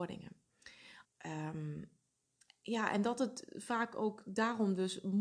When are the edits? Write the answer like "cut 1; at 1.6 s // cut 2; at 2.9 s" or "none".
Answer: cut 1; at 1.0 s